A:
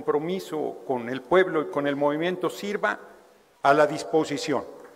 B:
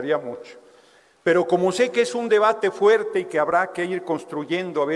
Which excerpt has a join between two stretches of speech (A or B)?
A